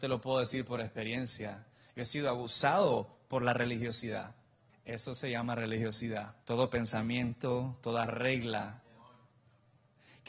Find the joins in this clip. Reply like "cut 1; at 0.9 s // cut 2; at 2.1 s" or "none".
cut 1; at 4.7 s // cut 2; at 6.4 s